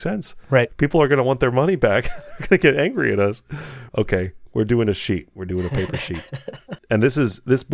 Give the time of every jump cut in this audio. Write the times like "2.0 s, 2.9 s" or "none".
3.9 s, 6.8 s